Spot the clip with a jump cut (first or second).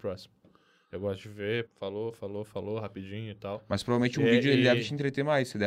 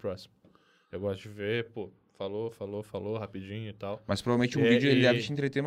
first